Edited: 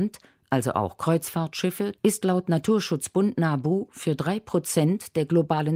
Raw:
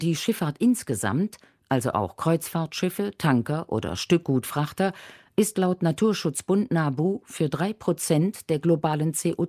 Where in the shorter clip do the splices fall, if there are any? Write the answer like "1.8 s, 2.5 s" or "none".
2.0 s